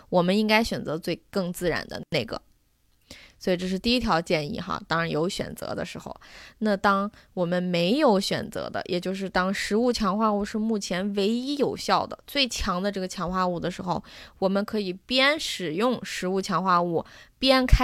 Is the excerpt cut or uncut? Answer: uncut